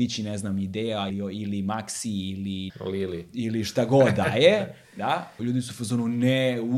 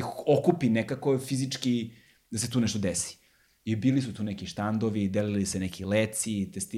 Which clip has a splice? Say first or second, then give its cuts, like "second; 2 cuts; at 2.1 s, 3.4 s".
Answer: first; 3 cuts; at 1.1 s, 2.7 s, 5.4 s